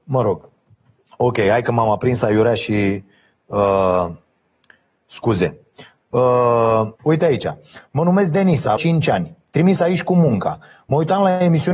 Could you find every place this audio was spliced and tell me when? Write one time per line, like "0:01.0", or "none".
0:06.9
0:08.8